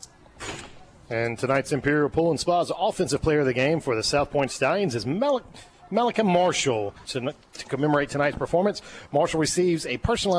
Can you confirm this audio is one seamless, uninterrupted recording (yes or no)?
no